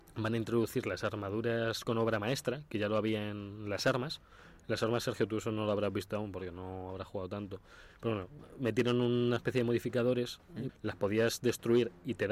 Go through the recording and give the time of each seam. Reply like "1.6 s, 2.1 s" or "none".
10.7 s